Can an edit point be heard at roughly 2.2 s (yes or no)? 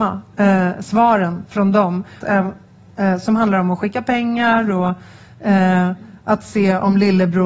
yes